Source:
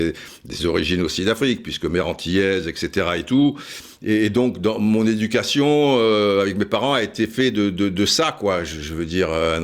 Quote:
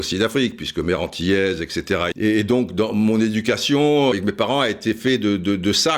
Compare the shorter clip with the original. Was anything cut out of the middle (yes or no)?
yes